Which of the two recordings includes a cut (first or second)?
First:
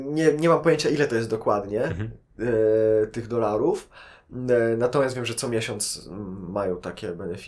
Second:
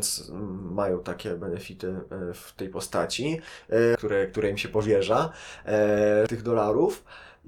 second